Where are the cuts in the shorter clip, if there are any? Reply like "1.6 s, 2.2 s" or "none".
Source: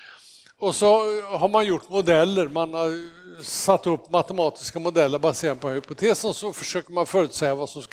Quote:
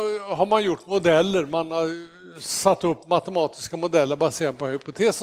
none